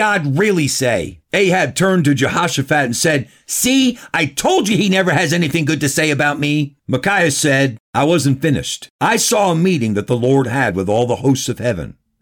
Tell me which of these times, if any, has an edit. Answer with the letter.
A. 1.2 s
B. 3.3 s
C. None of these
A